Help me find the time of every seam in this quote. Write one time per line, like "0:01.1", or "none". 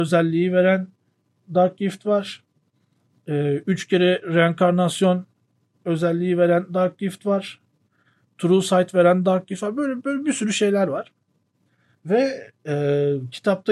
none